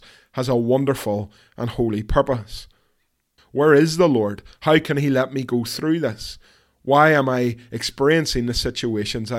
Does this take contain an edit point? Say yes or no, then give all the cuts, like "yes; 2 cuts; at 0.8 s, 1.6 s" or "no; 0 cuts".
yes; 1 cut; at 3.4 s